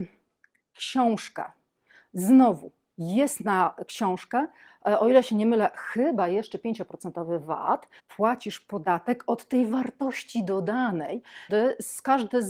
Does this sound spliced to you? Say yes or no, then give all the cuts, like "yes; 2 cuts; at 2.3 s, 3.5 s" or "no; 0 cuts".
yes; 2 cuts; at 8.0 s, 11.5 s